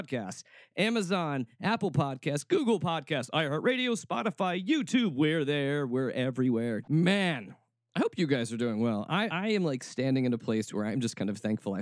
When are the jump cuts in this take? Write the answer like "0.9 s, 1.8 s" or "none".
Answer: 6.8 s, 9.3 s